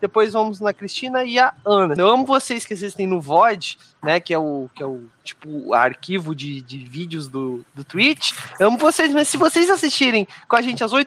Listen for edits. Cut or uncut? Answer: cut